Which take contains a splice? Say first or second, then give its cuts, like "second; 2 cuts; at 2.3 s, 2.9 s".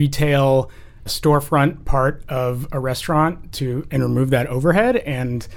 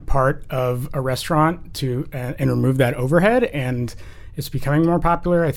first; 2 cuts; at 1.1 s, 3.9 s